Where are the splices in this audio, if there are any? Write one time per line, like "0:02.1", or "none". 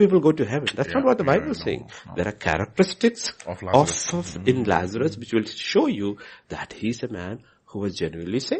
none